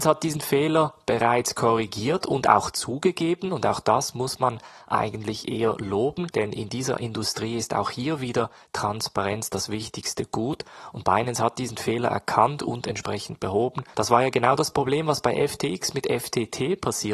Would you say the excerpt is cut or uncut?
cut